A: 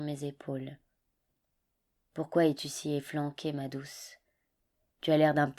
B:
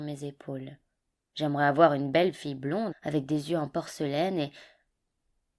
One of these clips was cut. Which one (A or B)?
B